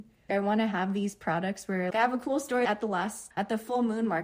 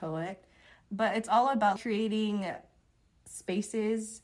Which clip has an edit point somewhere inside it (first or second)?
first